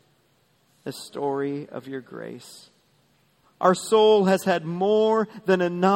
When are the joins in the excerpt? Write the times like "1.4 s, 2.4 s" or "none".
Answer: 3.4 s